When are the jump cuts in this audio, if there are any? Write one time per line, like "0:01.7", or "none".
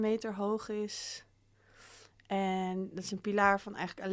none